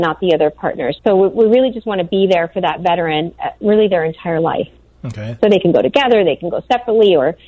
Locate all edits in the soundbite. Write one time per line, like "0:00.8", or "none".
0:01.0
0:05.4